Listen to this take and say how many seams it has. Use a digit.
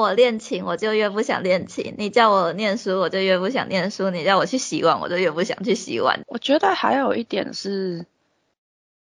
1